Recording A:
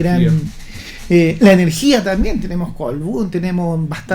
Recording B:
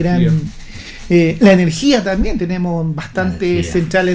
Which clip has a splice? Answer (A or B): B